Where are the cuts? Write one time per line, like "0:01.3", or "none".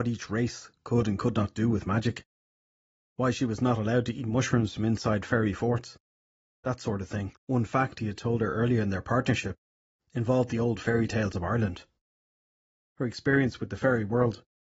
0:07.4
0:12.9